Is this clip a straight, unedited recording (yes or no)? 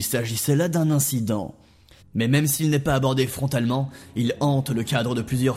no